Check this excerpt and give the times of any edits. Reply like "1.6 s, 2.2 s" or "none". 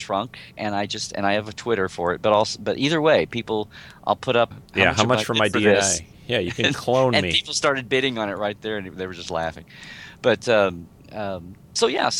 4.5 s